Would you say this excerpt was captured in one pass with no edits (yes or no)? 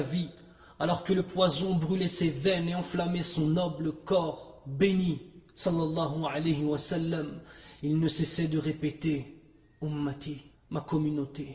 no